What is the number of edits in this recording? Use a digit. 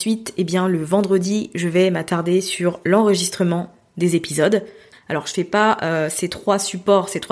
1